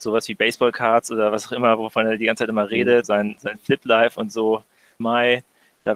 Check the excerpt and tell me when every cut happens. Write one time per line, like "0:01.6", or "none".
0:03.0
0:05.0